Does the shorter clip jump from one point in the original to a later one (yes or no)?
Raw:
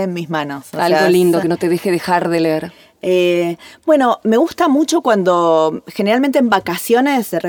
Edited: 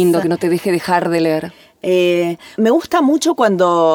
yes